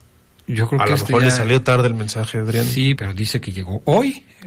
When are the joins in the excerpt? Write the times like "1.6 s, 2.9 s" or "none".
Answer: 3.0 s